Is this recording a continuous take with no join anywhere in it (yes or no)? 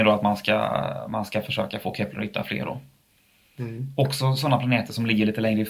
yes